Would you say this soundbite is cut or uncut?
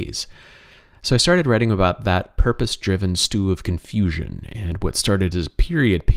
uncut